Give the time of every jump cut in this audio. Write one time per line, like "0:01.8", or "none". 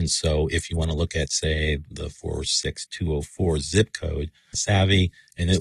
0:04.5